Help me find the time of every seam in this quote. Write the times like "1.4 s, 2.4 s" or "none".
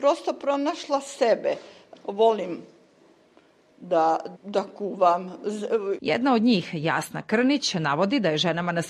1.9 s, 4.3 s, 6.0 s